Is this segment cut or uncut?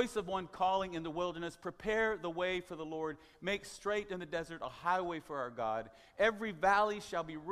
uncut